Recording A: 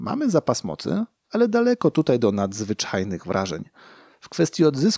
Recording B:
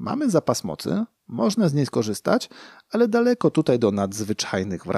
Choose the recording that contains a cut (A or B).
A